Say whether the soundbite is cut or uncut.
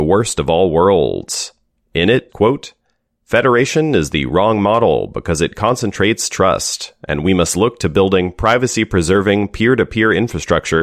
cut